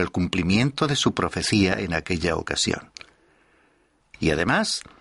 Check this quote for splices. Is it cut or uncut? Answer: cut